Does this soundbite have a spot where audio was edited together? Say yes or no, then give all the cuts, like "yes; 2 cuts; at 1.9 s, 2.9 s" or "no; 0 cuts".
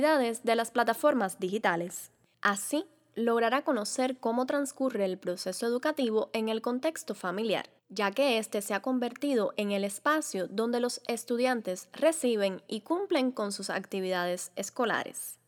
yes; 2 cuts; at 2.3 s, 7.8 s